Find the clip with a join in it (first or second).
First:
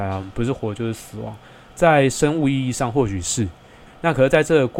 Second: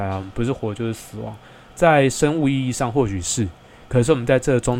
first